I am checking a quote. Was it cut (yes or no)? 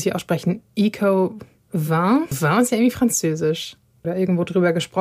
yes